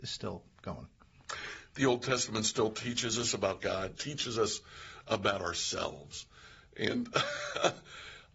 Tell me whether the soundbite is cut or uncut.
cut